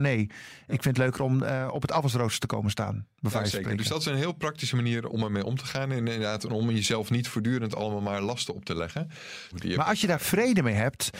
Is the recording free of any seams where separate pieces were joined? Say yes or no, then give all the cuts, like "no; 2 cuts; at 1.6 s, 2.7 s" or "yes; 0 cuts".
no; 2 cuts; at 5.1 s, 9.5 s